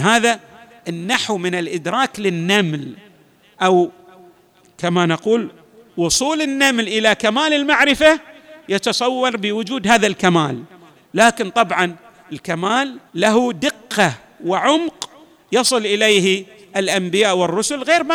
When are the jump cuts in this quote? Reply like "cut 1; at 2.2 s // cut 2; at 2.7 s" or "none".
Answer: cut 1; at 13.1 s